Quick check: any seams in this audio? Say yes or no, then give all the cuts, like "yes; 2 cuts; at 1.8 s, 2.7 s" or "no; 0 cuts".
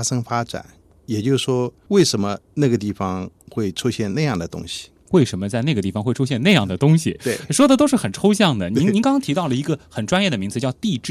no; 0 cuts